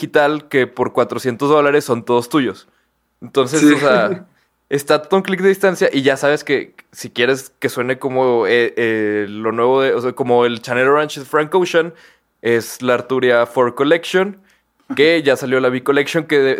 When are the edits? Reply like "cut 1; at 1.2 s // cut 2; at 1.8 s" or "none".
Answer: none